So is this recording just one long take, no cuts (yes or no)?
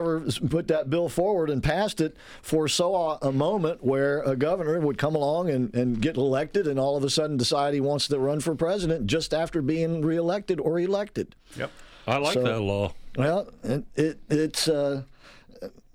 yes